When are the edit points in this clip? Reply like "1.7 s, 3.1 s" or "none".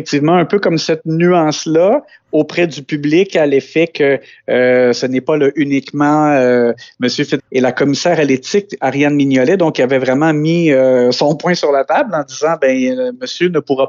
7.4 s